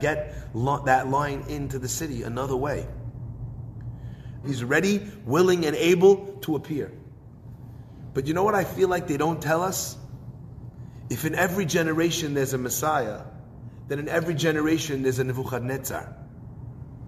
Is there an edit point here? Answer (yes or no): yes